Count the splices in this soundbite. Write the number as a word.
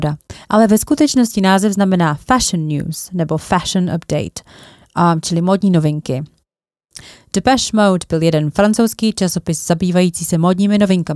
zero